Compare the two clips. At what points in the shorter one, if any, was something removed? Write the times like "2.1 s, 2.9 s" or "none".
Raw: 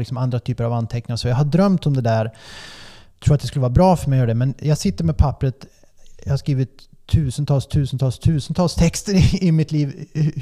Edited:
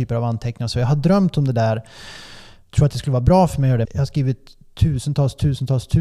3.8 s